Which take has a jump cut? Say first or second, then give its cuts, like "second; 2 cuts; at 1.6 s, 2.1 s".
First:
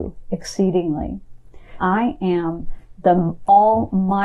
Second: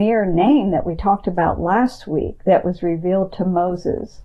first; 1 cut; at 1.8 s